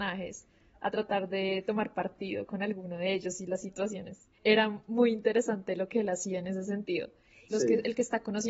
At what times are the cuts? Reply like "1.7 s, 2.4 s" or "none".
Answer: 4.3 s, 7.5 s